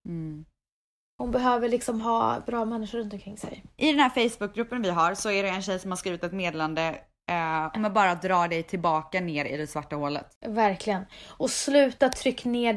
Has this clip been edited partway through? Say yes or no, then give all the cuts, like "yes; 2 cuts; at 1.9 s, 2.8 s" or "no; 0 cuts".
yes; 2 cuts; at 7.7 s, 10.4 s